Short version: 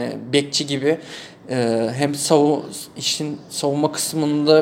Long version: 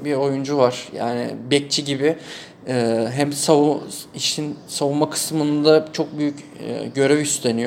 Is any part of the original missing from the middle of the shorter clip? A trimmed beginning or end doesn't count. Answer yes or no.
no